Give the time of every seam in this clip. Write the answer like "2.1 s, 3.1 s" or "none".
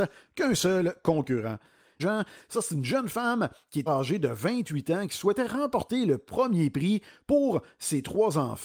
2.0 s, 3.9 s